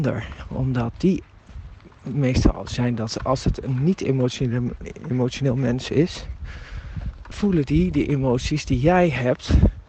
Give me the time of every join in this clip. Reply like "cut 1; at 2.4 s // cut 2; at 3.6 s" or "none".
cut 1; at 7.3 s